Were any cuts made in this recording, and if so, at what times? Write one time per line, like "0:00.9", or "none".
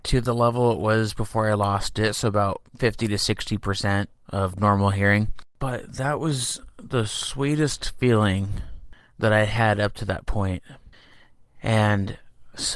0:02.7
0:05.5